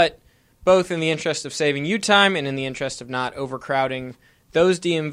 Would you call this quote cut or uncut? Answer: uncut